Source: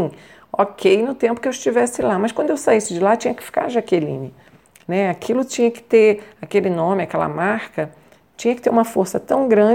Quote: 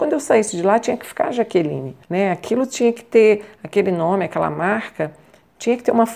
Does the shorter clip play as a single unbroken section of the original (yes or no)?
no